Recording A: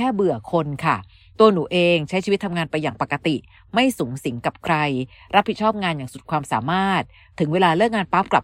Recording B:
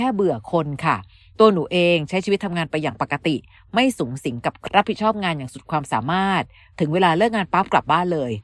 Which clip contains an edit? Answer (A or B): B